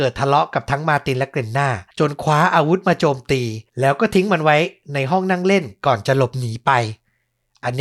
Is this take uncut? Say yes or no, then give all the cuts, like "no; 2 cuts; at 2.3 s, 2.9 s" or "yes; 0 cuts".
no; 2 cuts; at 1.9 s, 3.7 s